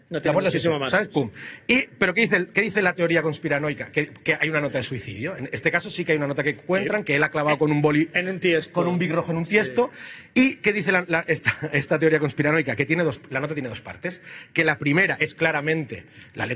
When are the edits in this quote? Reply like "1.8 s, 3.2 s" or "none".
none

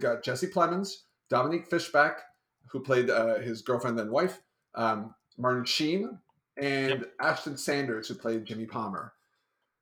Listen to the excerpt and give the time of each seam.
none

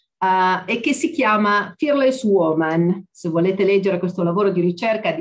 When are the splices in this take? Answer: none

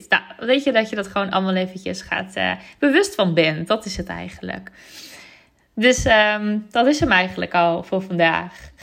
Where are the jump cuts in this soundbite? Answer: none

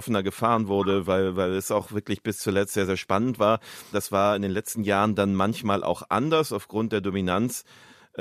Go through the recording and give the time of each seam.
3.9 s

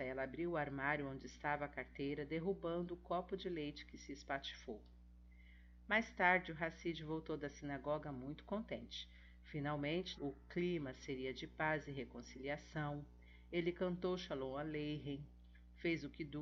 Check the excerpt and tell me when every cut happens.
10.2 s

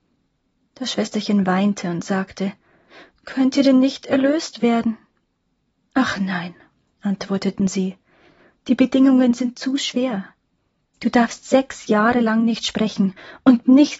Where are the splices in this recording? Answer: none

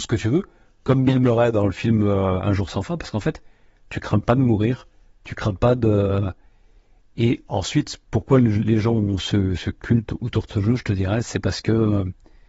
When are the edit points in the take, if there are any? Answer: none

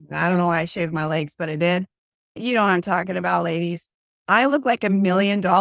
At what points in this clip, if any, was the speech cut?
none

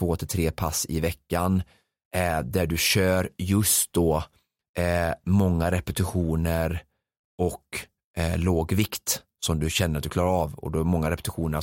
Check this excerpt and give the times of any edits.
none

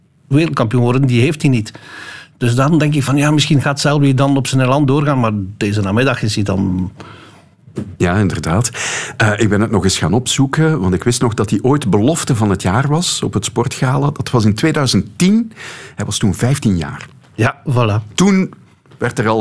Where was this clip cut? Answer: 8.0 s

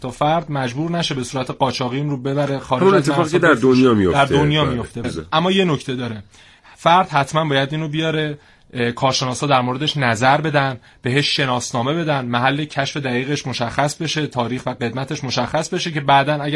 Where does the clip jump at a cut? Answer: 5.0 s

